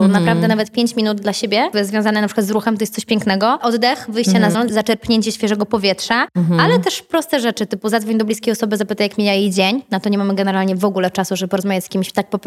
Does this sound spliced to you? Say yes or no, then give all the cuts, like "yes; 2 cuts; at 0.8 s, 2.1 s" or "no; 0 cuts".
yes; 1 cut; at 4.5 s